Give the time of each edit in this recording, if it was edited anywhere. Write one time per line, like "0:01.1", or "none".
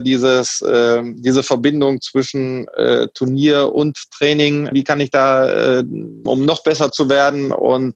0:04.7
0:06.3